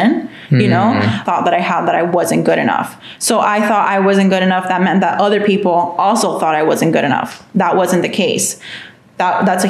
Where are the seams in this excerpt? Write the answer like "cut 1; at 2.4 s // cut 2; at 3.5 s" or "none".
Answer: cut 1; at 1.3 s